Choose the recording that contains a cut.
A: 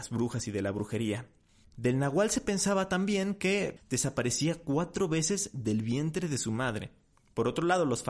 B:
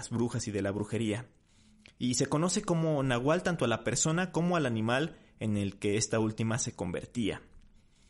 A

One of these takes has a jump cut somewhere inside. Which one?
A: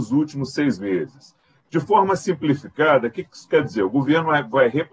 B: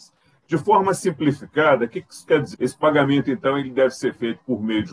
B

